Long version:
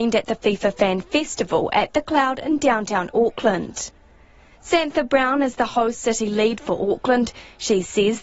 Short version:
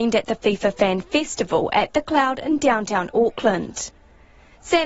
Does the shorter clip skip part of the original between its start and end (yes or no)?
no